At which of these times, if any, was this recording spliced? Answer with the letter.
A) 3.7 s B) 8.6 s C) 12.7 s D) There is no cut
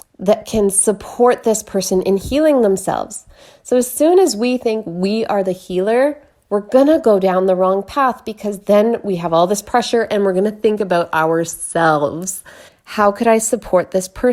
C